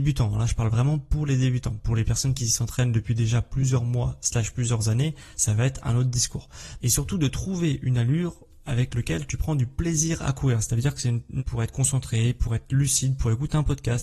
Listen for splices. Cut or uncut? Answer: cut